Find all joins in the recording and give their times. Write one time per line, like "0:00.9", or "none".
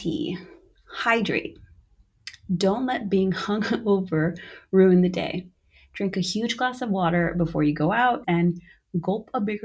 0:08.2